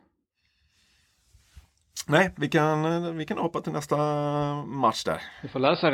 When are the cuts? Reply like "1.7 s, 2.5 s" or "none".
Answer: none